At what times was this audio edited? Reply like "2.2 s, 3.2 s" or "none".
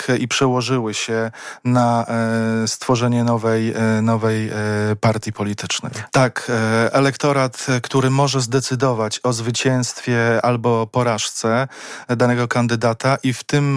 6.1 s